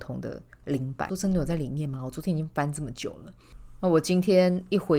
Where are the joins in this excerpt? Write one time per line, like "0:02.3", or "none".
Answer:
0:01.1